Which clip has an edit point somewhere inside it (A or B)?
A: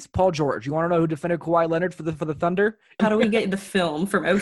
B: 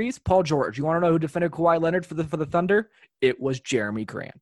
A